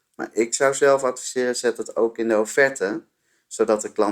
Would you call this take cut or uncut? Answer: uncut